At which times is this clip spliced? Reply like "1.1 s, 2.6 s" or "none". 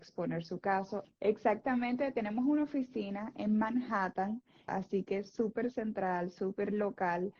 1.0 s, 4.7 s

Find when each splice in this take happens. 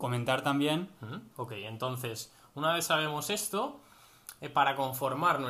1.3 s

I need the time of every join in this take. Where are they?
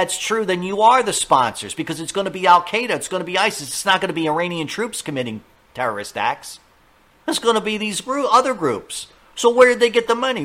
none

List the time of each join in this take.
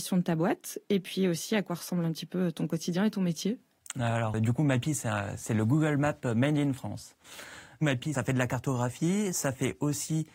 4.3 s

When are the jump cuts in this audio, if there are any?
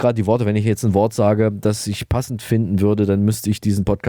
none

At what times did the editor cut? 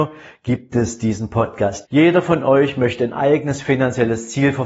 1.8 s

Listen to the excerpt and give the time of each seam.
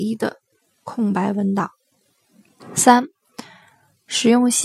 2.6 s

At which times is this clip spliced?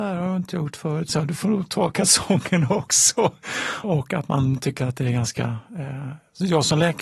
1.1 s, 3.8 s

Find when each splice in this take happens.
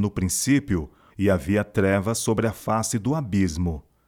1.1 s

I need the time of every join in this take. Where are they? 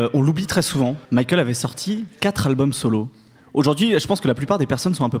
1.1 s

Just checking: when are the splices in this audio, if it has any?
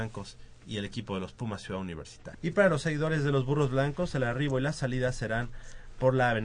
2.3 s

